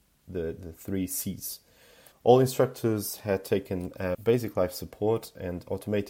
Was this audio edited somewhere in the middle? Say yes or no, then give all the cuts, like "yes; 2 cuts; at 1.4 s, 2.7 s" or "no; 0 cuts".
yes; 2 cuts; at 2.1 s, 4.1 s